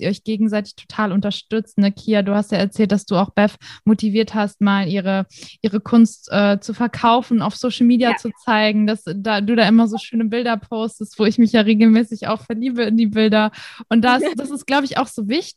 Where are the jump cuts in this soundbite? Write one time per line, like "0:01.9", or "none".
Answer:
none